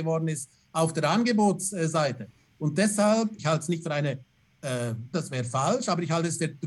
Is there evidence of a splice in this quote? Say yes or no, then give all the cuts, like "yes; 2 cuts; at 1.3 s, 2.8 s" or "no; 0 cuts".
yes; 2 cuts; at 3.4 s, 5.1 s